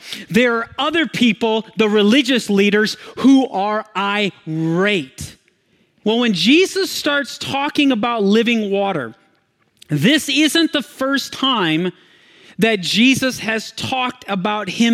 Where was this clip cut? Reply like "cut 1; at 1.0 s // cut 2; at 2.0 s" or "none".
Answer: cut 1; at 6.0 s